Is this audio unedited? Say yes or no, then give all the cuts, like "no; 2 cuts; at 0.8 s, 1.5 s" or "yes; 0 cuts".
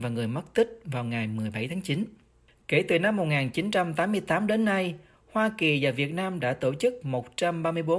yes; 0 cuts